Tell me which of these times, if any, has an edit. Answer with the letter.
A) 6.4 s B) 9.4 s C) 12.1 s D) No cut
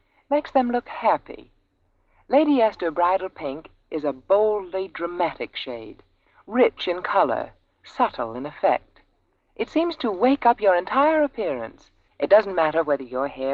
C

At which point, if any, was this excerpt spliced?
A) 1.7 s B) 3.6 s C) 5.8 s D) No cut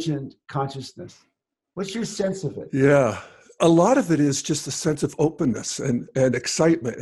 B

